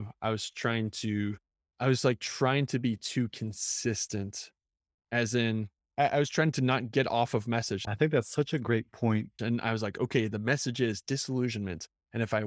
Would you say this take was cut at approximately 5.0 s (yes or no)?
no